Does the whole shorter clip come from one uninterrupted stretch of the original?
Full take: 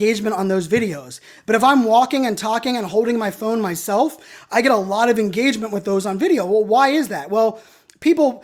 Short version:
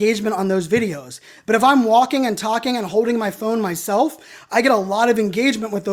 yes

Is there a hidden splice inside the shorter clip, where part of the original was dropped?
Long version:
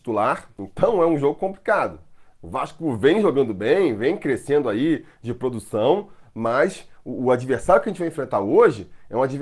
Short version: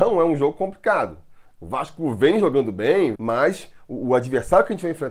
yes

